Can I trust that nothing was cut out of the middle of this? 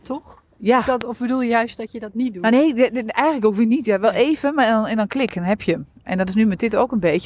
yes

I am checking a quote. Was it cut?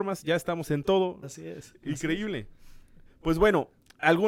yes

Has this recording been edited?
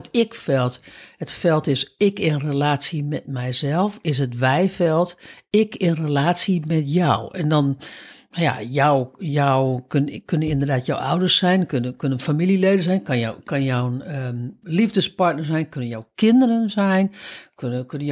yes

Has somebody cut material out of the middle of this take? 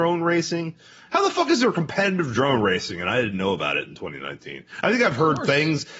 no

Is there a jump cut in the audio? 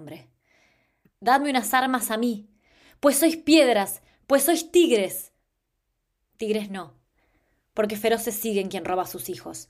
no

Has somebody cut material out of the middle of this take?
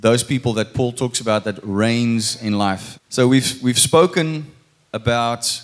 yes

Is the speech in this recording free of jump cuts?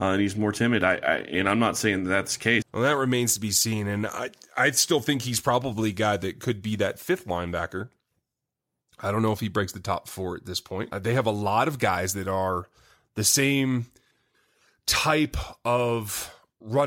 no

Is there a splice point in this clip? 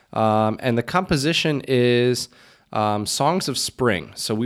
no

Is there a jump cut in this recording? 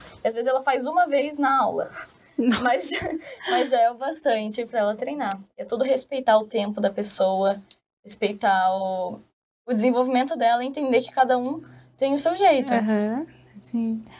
no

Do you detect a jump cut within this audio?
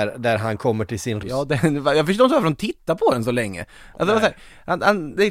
yes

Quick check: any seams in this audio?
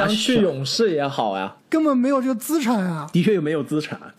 yes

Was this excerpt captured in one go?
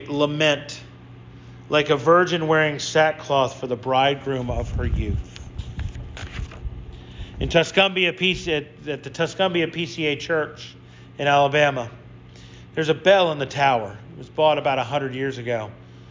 yes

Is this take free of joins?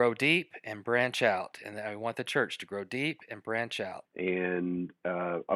no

